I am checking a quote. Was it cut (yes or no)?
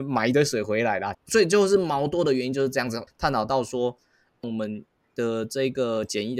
yes